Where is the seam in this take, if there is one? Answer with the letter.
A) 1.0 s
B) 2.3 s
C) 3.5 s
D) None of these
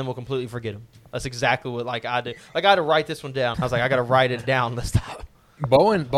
C